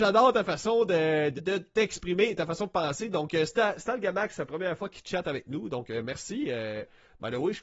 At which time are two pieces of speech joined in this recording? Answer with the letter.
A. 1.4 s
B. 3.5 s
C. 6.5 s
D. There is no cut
A